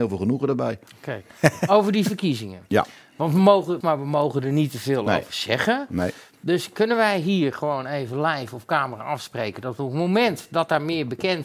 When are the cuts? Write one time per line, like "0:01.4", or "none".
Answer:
0:03.8